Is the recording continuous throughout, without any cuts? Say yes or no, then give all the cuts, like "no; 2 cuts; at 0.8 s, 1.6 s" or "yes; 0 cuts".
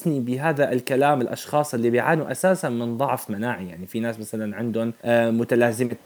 no; 1 cut; at 5.0 s